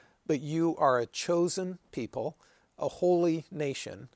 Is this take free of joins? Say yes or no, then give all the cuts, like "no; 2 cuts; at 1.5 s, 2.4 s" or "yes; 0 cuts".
no; 1 cut; at 2.6 s